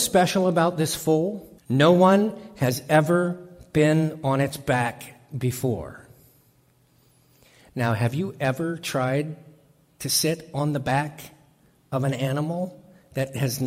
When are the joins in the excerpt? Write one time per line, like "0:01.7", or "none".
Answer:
0:01.6